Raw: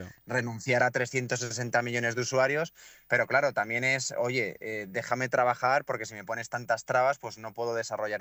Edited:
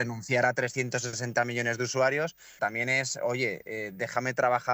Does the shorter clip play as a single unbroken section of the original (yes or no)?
no